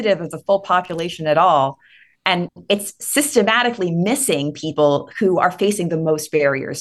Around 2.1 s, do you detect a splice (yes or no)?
no